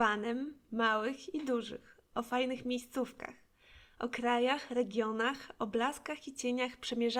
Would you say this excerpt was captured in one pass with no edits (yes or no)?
yes